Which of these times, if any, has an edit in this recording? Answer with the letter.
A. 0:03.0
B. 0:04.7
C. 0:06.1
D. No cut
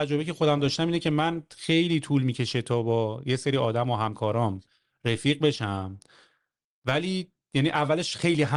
D